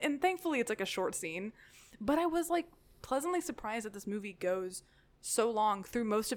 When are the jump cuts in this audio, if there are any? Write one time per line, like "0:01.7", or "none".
none